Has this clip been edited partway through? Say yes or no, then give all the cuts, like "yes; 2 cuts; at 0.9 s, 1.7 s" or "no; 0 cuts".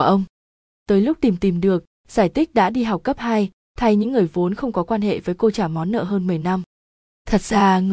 no; 0 cuts